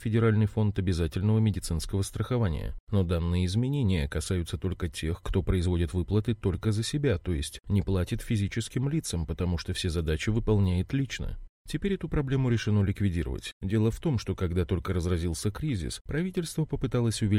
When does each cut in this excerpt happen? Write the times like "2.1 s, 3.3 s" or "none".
5.2 s, 11.6 s, 13.5 s